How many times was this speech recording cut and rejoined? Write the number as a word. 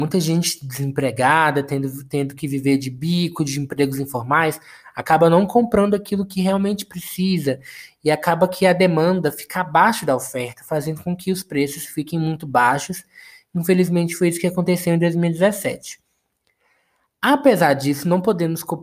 zero